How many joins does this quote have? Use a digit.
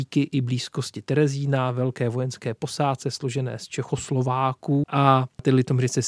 1